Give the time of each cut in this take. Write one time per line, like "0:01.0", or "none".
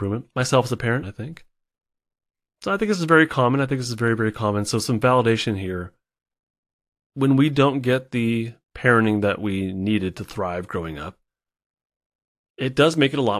0:01.0
0:08.6